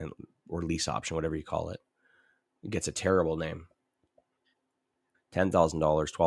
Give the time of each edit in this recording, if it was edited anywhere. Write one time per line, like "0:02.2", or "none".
0:05.1